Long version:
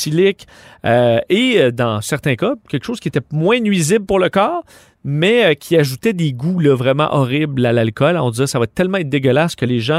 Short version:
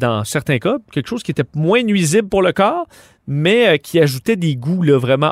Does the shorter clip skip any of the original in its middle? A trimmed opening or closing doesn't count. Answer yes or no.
no